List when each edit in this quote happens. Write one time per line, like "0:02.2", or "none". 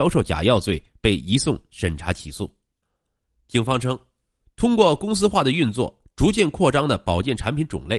0:02.8